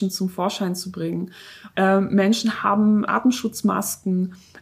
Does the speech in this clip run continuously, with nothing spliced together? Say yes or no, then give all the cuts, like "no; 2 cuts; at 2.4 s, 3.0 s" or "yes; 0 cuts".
no; 2 cuts; at 1.7 s, 3.1 s